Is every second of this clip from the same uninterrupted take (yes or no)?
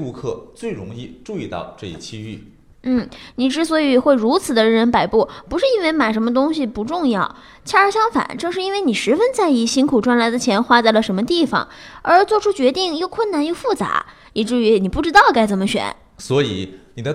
yes